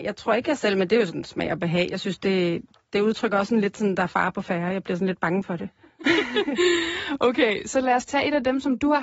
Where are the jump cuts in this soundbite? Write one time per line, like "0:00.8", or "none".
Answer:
none